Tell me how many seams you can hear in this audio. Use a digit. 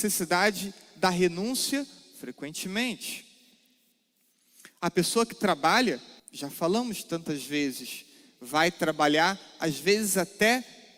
1